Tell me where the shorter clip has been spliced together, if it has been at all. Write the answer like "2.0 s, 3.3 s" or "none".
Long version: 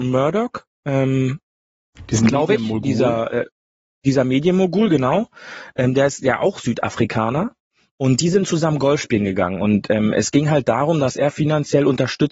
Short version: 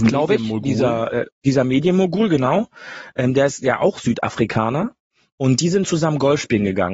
1.3 s